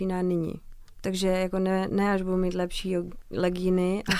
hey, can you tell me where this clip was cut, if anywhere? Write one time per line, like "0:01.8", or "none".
none